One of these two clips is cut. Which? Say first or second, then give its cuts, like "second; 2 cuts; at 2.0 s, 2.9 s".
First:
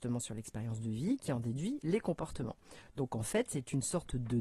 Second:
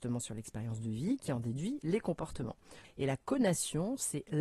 second; 1 cut; at 2.8 s